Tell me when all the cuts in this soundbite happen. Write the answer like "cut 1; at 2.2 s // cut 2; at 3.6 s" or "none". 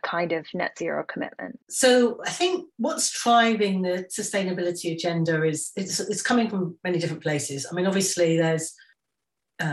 cut 1; at 1.6 s